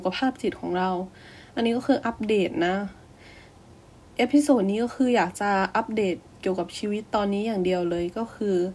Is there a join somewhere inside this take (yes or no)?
no